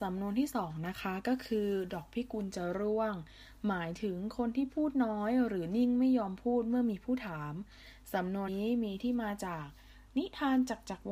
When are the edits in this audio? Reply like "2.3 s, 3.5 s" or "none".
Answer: 8.5 s